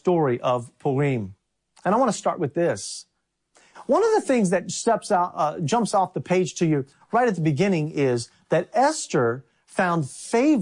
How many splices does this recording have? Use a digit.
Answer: 0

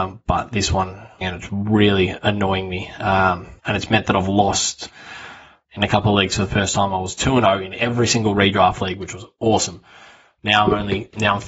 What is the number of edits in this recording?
2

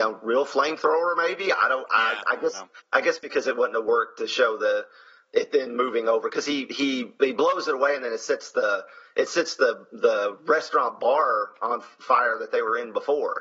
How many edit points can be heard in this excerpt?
0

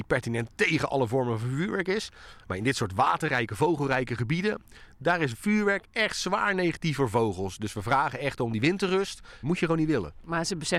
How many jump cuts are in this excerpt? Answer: 1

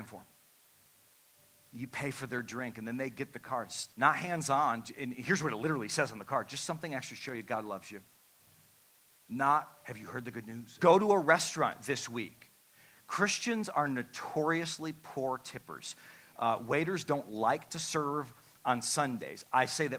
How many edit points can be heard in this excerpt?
2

